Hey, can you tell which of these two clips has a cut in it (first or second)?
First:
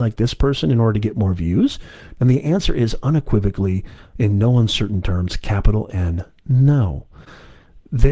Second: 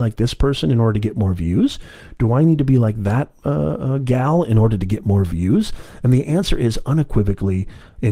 first